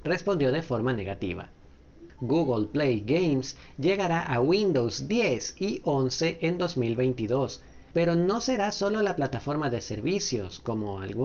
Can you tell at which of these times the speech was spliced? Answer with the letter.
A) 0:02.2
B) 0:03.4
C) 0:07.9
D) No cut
A